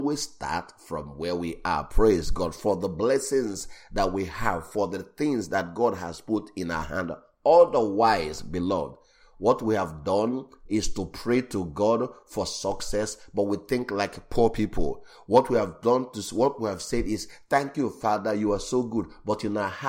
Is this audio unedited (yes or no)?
yes